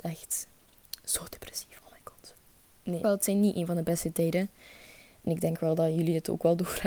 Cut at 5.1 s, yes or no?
no